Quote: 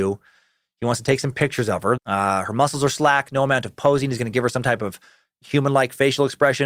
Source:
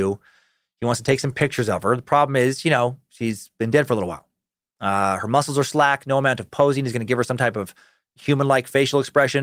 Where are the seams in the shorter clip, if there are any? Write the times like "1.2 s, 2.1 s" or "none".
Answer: 2.0 s